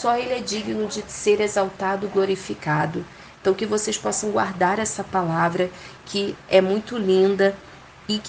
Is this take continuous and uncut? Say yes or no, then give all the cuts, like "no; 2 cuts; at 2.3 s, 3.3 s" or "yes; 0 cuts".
yes; 0 cuts